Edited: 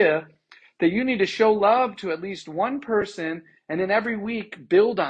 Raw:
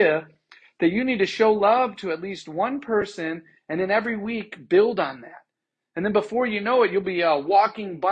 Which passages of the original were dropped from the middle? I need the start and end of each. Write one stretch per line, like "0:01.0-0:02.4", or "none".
none

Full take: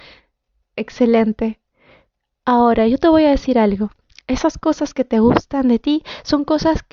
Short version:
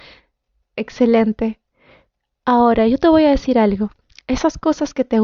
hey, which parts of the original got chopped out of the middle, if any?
none

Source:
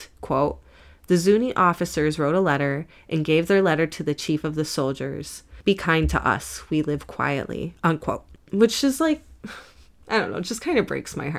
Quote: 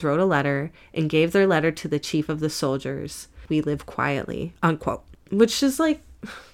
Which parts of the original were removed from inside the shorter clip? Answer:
0:05.6-0:06.7

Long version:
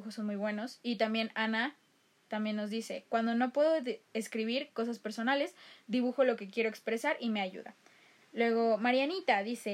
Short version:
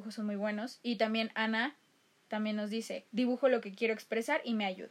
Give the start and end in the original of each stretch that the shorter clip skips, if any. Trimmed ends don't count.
0:03.1-0:05.8

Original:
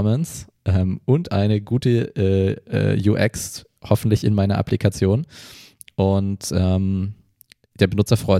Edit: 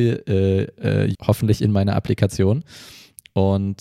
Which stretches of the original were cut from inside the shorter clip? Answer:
0:03.0-0:03.8

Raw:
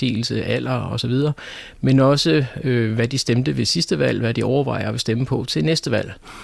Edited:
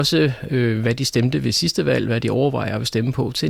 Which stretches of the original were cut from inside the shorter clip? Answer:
none

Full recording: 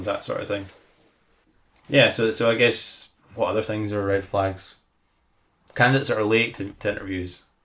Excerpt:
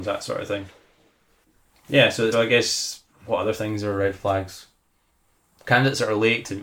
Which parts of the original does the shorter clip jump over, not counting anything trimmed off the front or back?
0:02.3-0:02.4

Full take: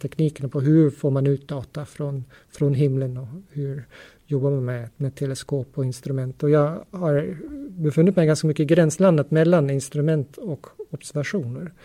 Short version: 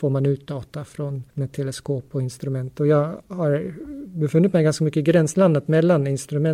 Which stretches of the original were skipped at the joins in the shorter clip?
0:02.3-0:04.9

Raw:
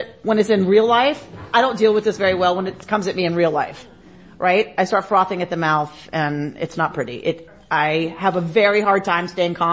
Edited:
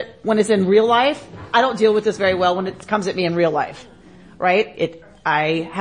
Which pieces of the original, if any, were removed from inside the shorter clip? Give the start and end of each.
0:04.7-0:07.2

